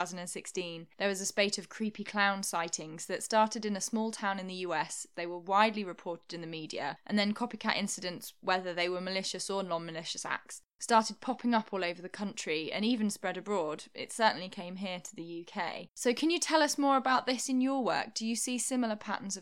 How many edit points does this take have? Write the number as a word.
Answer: zero